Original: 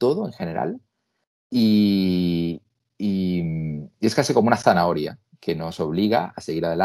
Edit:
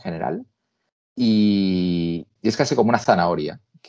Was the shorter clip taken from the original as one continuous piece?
no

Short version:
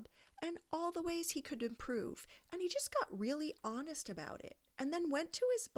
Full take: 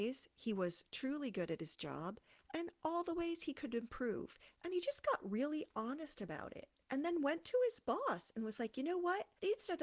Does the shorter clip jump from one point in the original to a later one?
no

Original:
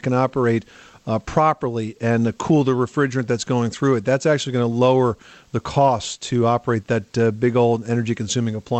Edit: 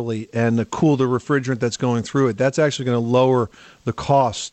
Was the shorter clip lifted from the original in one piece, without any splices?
yes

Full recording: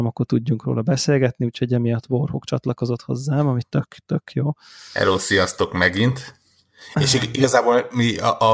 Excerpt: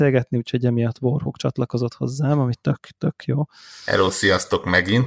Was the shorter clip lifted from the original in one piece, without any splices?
yes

